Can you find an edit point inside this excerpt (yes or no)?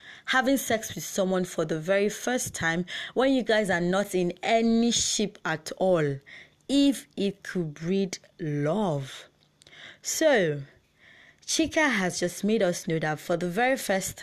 no